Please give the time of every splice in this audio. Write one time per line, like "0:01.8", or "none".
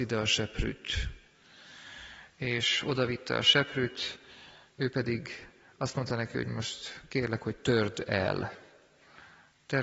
none